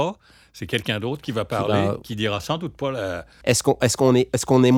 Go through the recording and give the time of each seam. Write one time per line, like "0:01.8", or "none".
0:03.4